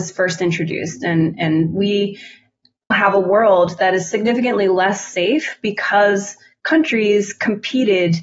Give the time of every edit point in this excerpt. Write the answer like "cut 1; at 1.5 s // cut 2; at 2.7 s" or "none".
cut 1; at 2.9 s